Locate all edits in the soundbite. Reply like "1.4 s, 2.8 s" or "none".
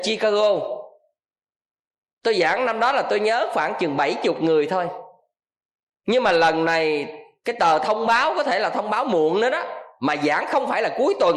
none